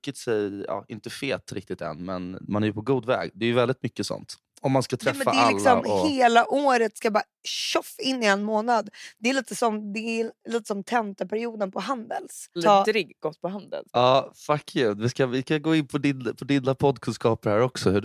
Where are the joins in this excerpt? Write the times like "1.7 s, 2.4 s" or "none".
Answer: 12.6 s, 13.9 s